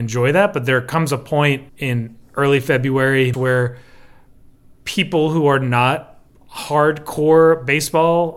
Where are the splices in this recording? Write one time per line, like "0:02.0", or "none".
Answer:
0:01.7
0:03.3